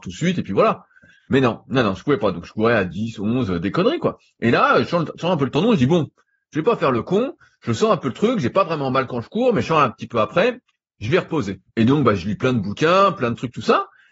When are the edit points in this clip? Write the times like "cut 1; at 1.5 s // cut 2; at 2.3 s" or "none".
cut 1; at 11.7 s